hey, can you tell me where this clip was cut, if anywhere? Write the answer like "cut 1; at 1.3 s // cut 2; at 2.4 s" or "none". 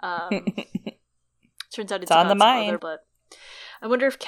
cut 1; at 2.8 s